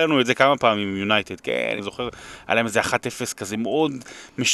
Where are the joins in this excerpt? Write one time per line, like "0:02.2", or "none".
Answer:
0:01.8